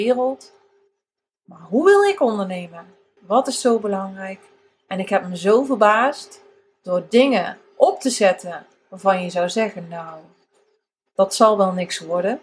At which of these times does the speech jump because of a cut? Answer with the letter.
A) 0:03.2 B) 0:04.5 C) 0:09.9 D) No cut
A